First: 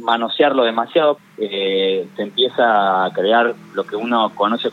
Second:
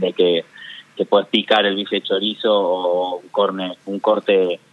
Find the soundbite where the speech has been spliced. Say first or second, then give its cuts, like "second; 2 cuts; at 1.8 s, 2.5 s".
first; 1 cut; at 1.2 s